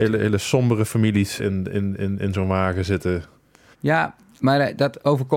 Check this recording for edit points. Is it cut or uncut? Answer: cut